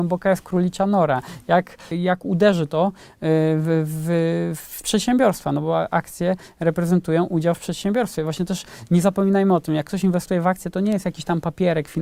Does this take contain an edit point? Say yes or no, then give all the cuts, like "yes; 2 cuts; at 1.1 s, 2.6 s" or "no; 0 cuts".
yes; 1 cut; at 1.9 s